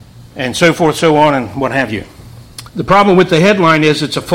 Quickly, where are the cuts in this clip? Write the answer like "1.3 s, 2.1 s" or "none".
2.7 s